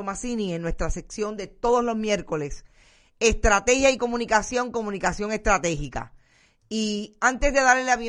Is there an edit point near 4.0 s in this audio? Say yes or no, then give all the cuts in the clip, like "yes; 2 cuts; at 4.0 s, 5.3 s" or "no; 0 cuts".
no; 0 cuts